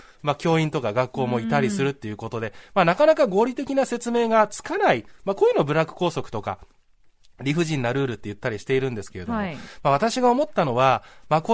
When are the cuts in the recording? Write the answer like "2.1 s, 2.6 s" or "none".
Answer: none